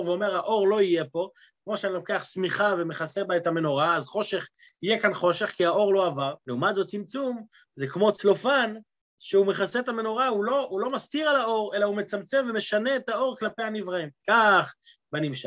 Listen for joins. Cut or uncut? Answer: cut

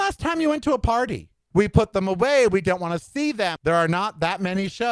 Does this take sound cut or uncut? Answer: cut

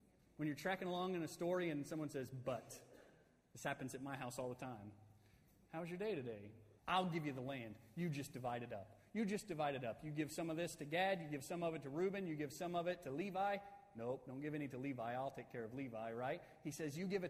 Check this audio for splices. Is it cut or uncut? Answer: cut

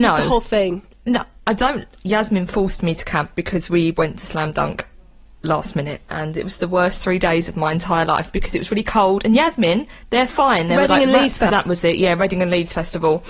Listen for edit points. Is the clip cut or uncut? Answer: cut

